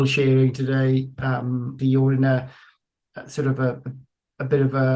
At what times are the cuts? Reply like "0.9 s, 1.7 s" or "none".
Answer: 1.8 s